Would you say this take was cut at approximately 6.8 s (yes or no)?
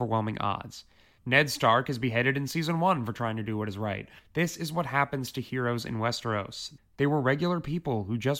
yes